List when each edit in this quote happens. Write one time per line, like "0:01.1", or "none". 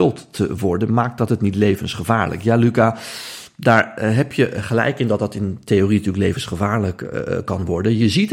none